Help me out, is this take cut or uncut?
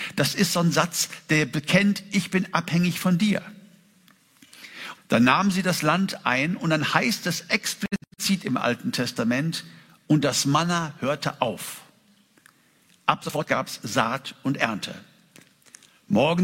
cut